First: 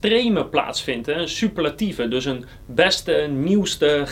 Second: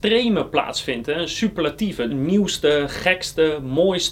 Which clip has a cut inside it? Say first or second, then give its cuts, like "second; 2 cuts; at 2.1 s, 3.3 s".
second; 1 cut; at 2.1 s